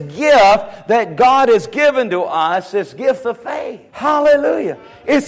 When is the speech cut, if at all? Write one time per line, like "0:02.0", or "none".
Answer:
0:03.9